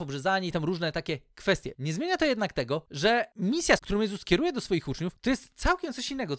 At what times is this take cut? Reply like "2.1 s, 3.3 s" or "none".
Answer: 1.7 s, 3.8 s